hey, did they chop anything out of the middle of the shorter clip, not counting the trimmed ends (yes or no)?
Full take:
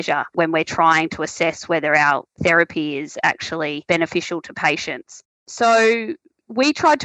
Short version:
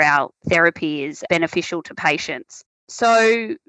yes